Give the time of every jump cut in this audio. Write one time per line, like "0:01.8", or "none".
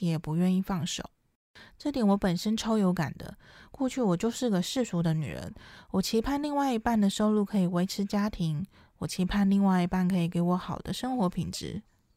none